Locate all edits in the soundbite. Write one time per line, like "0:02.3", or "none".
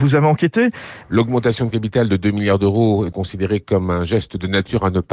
0:01.0
0:03.1